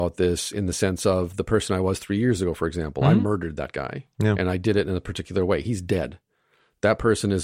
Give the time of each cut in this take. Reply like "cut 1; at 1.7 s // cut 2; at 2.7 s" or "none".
none

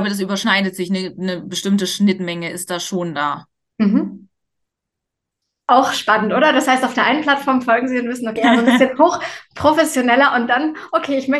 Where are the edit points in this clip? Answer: cut 1; at 8.4 s

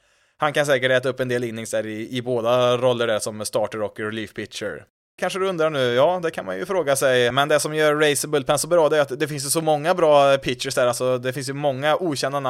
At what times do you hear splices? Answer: cut 1; at 5.2 s // cut 2; at 7.3 s

